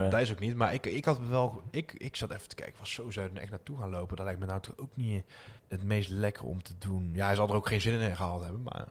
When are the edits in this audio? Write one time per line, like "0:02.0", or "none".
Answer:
0:05.6